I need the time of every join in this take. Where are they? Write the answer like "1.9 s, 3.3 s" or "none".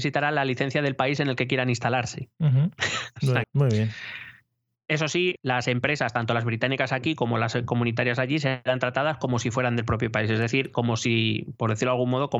3.4 s, 5.4 s